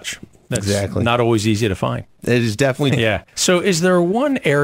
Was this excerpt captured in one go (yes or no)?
no